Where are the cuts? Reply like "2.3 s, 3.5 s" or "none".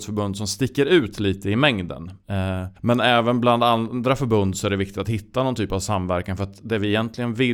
2.8 s